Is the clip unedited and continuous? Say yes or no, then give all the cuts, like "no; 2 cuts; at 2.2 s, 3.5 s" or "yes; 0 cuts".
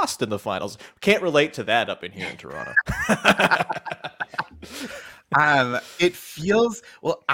yes; 0 cuts